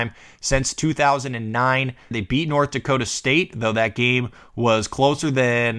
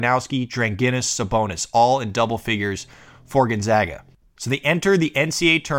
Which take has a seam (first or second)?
first